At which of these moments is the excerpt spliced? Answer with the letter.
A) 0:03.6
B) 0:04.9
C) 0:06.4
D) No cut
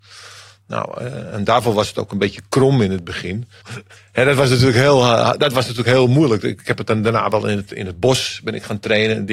A